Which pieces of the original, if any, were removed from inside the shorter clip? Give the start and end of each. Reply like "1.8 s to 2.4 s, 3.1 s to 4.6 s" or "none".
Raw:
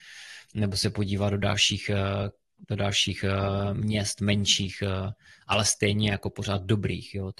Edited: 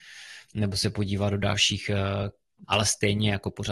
2.6 s to 5.4 s